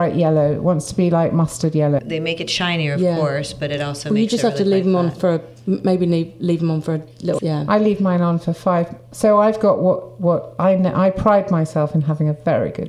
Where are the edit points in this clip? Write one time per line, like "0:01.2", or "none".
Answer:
0:02.0
0:07.4